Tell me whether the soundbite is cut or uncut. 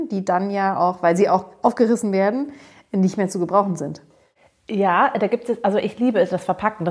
uncut